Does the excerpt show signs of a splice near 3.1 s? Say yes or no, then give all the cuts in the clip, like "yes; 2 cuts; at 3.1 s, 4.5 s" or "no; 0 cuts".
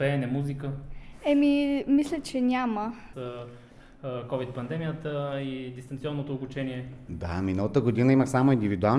yes; 2 cuts; at 3.1 s, 7.1 s